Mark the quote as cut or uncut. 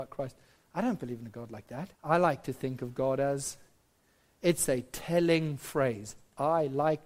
cut